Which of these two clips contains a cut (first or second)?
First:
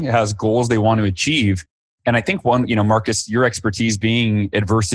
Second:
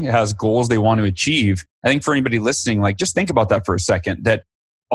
second